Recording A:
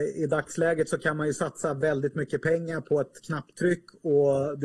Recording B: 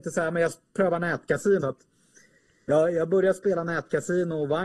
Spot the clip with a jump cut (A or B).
B